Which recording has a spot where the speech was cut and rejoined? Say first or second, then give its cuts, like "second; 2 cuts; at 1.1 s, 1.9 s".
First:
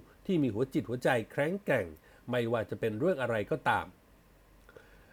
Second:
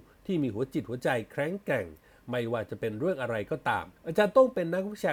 second; 1 cut; at 4.0 s